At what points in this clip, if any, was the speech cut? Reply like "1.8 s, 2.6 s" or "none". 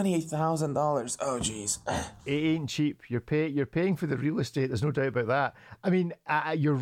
none